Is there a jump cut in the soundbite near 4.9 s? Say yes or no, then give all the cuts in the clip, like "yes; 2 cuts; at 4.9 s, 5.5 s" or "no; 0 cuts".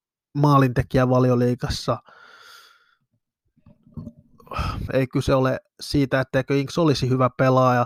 yes; 1 cut; at 4.9 s